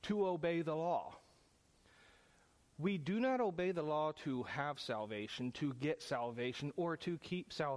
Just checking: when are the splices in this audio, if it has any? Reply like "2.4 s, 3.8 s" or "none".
none

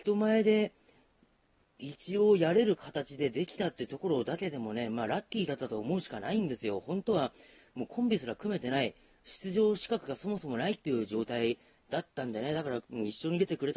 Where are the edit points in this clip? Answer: 12.8 s

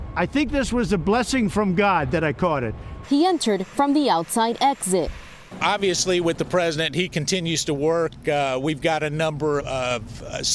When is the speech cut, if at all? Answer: 3.0 s, 9.6 s

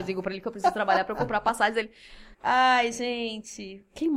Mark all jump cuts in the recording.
2.3 s

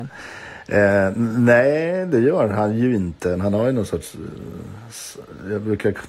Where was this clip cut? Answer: 3.4 s

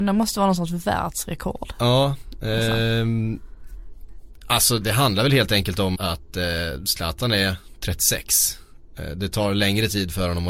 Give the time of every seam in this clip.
4.8 s, 5.9 s

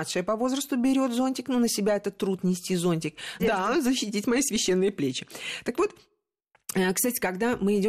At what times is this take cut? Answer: 3.4 s

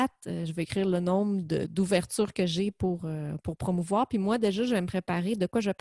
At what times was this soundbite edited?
none

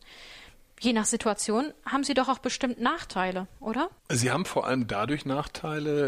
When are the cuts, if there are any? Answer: 4.0 s

